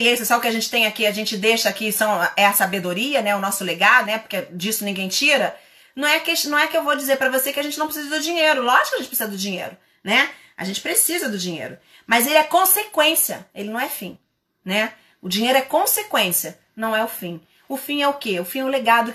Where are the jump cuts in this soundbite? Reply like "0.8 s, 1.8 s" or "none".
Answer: 4.0 s